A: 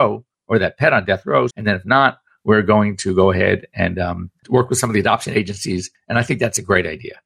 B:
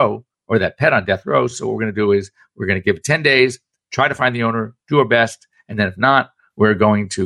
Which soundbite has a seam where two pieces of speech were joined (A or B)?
A